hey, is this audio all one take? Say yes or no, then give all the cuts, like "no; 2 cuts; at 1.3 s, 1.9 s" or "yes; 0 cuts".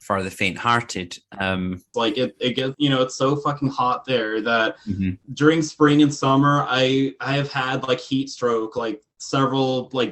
no; 1 cut; at 1.9 s